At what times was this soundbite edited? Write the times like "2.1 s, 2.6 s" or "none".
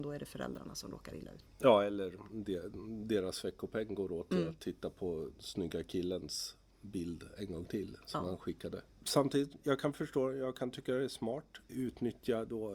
none